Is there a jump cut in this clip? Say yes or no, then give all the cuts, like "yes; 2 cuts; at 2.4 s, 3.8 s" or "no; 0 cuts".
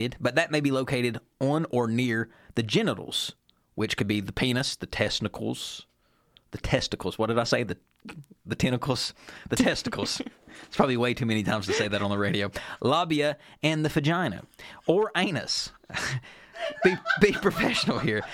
yes; 1 cut; at 15.8 s